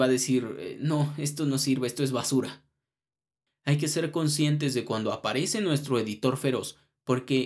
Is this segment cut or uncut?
cut